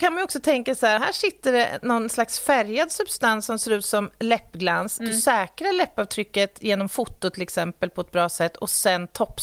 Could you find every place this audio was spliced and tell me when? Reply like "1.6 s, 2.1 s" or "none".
1.0 s, 5.0 s